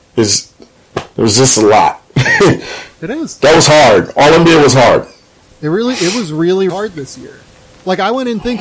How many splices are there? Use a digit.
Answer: 1